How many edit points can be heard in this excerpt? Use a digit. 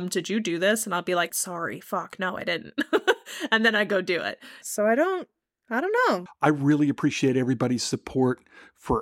3